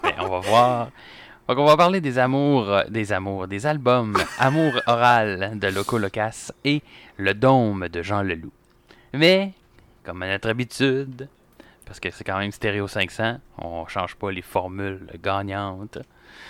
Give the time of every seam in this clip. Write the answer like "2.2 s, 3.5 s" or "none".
none